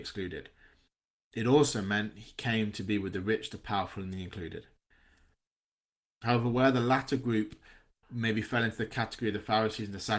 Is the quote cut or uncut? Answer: uncut